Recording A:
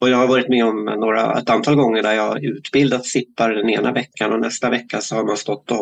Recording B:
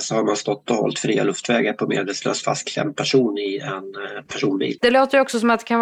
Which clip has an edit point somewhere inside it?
B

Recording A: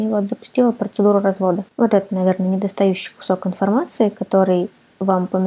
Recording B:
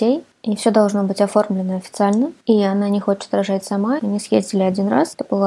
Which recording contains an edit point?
B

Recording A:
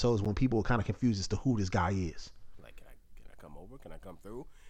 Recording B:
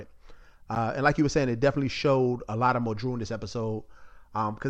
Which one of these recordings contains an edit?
A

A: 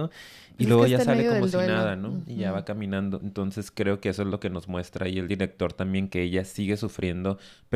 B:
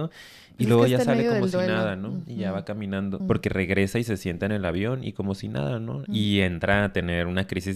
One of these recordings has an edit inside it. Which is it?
B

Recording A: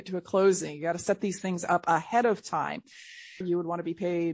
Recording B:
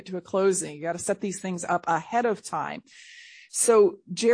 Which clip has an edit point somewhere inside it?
A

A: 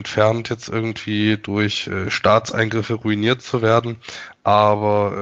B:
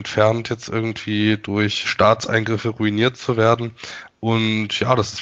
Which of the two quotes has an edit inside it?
B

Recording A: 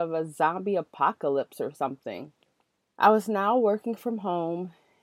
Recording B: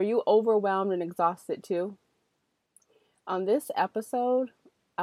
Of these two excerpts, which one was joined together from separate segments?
A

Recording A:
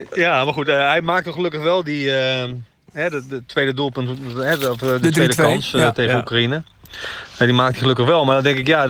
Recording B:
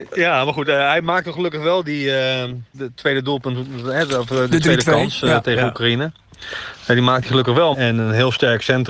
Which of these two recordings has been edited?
B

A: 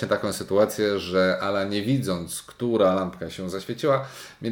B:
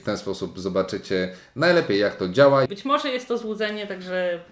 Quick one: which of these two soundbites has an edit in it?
B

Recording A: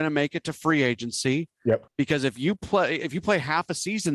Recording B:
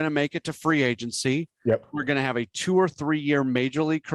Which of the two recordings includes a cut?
A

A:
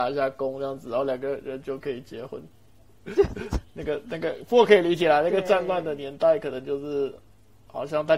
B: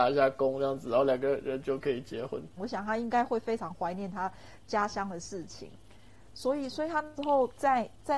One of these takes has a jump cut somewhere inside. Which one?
B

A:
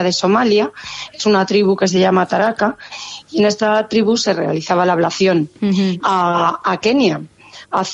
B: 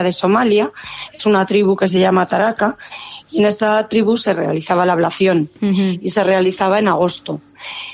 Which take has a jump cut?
A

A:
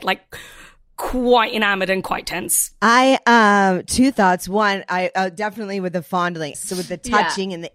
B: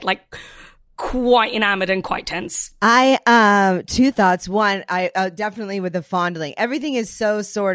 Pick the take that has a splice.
A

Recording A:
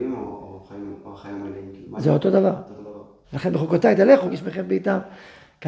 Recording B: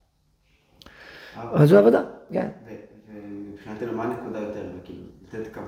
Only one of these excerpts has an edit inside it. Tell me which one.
A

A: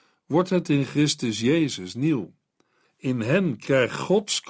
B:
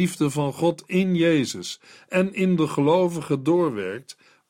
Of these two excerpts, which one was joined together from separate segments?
A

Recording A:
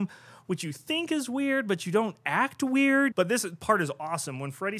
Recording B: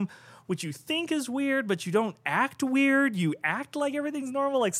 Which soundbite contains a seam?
A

